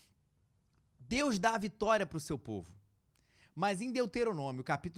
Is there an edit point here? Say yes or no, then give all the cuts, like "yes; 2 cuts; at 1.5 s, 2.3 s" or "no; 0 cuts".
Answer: no; 0 cuts